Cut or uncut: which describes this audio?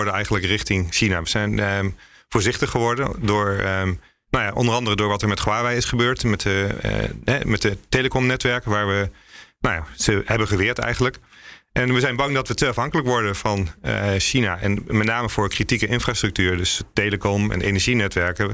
uncut